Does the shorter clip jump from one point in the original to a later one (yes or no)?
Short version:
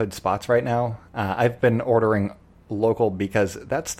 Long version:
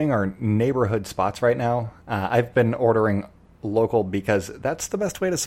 no